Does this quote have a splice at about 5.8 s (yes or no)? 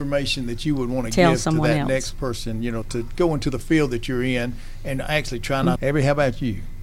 yes